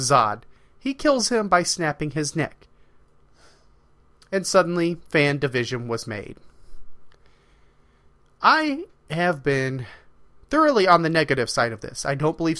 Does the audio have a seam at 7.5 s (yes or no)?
no